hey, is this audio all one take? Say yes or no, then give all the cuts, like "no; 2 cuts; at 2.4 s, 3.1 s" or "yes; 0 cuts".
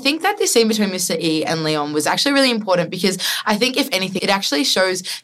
no; 1 cut; at 4.2 s